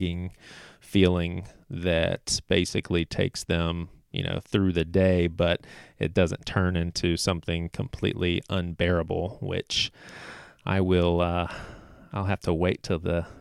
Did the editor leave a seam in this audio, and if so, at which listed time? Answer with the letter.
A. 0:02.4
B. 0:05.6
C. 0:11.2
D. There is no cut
D